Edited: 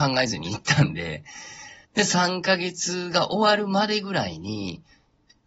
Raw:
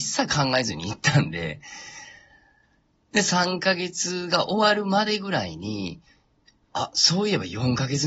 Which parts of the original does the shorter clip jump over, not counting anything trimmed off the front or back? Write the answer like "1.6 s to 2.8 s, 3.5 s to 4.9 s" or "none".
2.2 s to 3.0 s